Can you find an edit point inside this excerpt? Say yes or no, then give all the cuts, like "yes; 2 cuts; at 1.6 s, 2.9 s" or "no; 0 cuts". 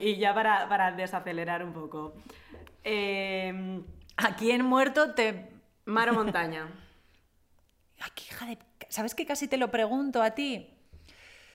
no; 0 cuts